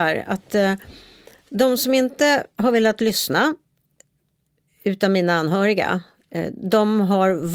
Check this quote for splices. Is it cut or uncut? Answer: uncut